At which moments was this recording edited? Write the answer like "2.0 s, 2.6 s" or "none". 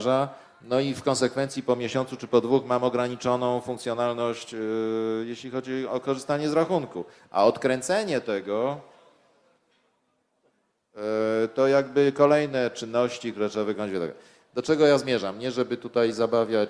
none

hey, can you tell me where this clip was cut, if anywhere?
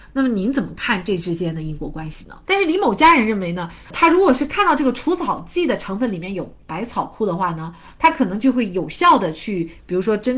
2.4 s, 3.8 s

